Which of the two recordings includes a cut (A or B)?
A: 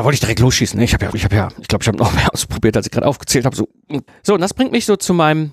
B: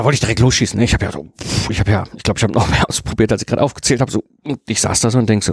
A